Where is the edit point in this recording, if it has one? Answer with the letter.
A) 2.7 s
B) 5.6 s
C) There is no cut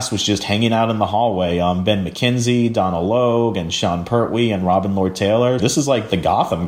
B